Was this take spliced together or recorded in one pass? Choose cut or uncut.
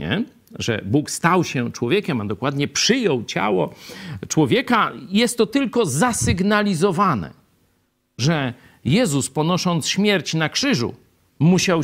uncut